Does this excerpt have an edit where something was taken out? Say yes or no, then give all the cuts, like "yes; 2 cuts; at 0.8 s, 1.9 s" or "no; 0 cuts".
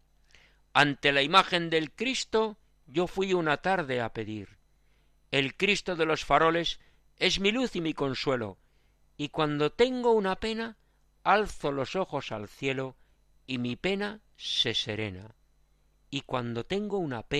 no; 0 cuts